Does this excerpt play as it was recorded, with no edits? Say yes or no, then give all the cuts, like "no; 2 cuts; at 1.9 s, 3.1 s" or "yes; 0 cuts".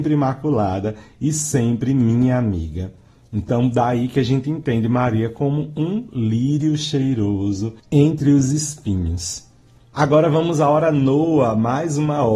yes; 0 cuts